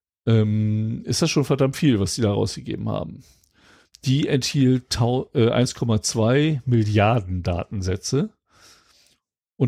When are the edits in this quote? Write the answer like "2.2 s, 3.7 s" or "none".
3.9 s